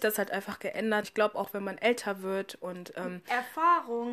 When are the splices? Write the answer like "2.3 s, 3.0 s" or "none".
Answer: 1.0 s